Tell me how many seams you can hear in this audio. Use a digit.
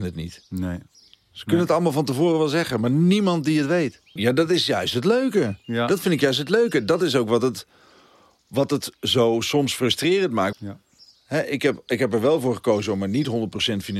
2